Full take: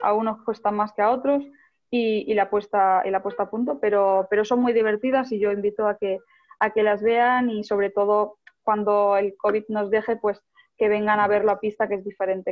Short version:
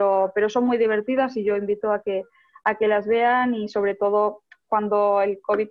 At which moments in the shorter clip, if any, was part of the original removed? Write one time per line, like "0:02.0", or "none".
none